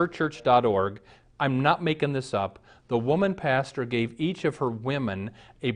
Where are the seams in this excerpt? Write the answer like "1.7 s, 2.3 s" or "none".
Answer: none